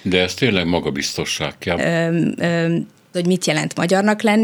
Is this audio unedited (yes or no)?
no